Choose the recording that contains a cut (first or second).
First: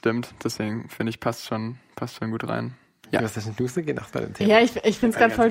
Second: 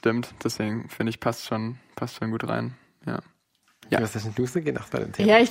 first